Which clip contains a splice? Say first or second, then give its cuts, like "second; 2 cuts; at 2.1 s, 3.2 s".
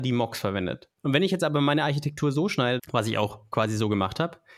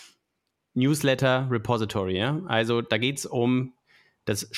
first; 2 cuts; at 1.0 s, 2.8 s